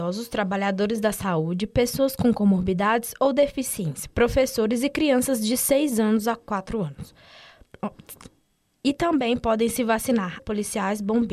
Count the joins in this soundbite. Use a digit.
1